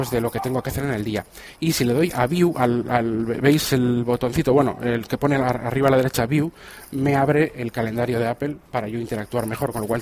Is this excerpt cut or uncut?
uncut